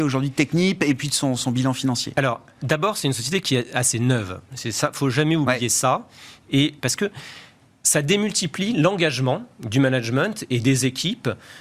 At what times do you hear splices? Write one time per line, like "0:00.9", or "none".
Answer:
0:06.8